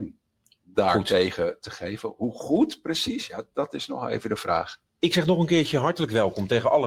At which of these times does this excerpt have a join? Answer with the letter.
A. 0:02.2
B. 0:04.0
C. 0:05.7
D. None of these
D